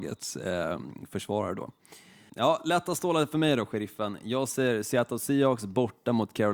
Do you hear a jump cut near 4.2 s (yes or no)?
no